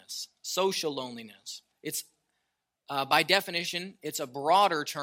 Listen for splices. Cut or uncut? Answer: uncut